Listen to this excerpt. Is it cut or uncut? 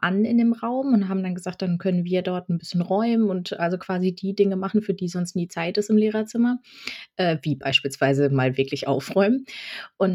uncut